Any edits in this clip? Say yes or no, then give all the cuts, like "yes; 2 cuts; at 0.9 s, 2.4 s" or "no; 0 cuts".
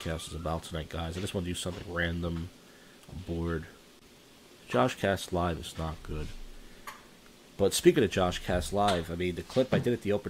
no; 0 cuts